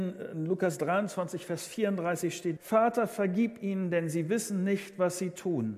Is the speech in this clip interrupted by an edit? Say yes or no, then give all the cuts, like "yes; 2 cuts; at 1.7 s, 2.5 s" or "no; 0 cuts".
yes; 1 cut; at 2.6 s